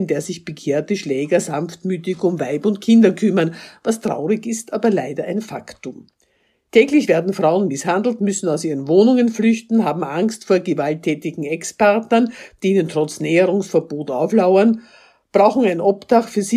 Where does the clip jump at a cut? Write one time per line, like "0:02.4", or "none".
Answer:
none